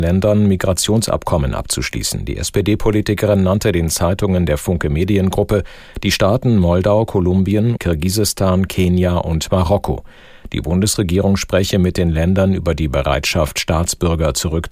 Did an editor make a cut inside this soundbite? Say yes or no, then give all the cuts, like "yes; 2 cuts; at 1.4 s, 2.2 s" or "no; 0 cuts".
yes; 1 cut; at 7.8 s